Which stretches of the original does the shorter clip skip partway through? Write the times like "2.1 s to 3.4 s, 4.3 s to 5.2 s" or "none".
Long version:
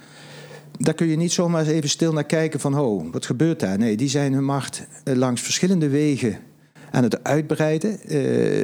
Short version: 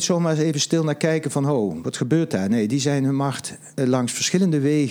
none